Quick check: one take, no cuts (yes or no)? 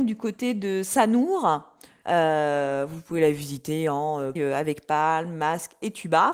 no